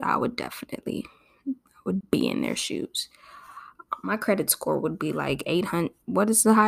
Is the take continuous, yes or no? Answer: no